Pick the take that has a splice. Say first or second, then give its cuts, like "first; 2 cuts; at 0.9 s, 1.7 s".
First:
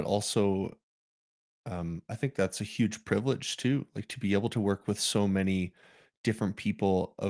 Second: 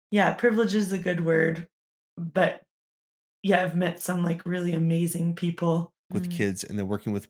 second; 1 cut; at 6.1 s